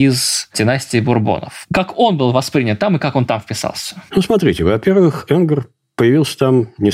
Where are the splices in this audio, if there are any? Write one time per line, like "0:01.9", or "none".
none